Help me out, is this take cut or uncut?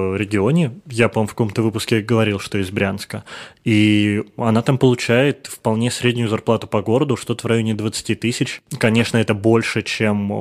uncut